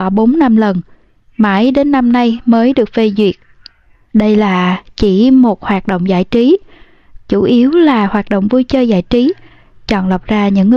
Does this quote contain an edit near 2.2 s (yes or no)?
no